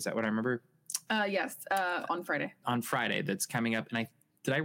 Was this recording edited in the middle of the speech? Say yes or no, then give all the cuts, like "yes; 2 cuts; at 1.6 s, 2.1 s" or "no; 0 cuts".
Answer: no; 0 cuts